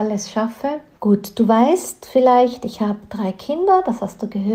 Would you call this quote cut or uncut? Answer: cut